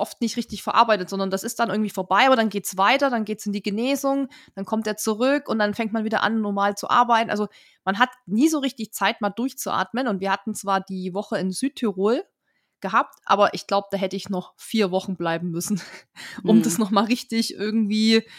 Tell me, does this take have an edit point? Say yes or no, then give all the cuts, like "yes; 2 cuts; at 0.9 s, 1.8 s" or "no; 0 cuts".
no; 0 cuts